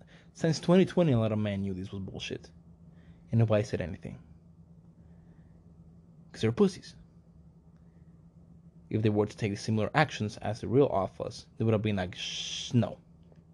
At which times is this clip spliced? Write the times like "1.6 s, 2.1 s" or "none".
11.5 s